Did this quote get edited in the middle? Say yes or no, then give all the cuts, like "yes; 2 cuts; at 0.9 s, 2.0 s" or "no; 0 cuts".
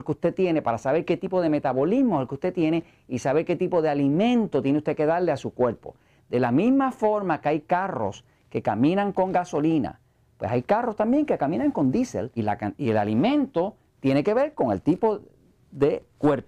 yes; 1 cut; at 12.4 s